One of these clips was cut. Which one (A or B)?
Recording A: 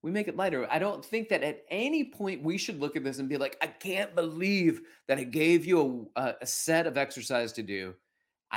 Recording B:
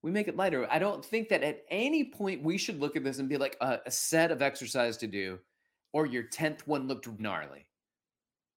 B